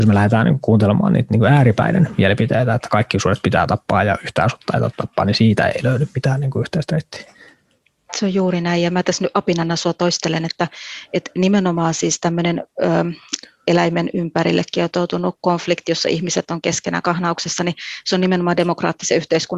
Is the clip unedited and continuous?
yes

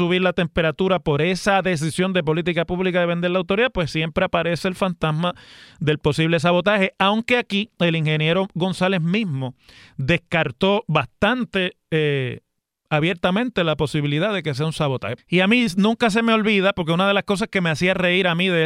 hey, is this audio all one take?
no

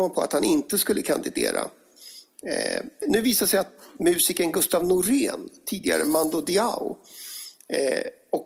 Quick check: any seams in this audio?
yes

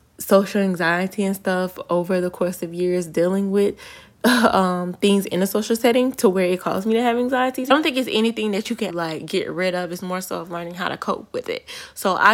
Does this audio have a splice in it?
yes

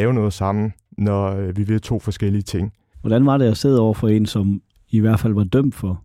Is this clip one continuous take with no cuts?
no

